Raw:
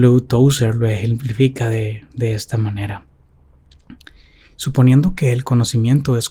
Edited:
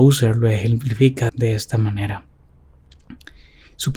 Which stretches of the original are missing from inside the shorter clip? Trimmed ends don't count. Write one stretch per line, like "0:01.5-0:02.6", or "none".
0:01.7-0:02.1